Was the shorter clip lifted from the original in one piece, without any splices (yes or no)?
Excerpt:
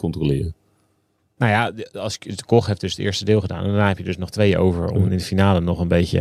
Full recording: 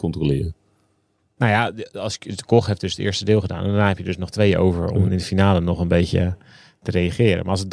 yes